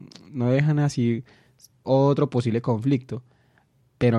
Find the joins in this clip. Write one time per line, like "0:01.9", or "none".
0:01.8